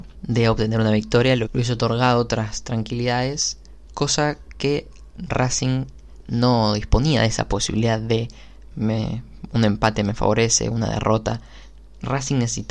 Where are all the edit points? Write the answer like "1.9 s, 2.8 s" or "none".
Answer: 1.5 s, 8.7 s